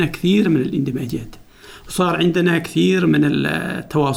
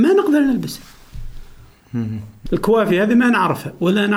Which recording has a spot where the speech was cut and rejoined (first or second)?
second